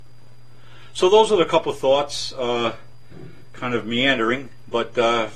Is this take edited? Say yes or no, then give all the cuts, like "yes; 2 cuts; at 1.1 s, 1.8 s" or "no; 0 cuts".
no; 0 cuts